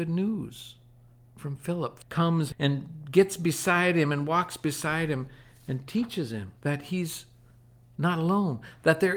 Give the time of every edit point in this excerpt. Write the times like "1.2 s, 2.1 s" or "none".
6.6 s